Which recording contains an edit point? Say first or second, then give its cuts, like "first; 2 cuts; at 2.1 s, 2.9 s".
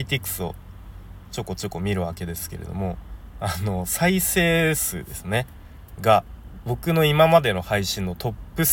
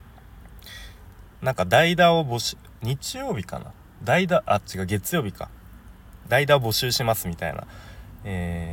second; 1 cut; at 1.4 s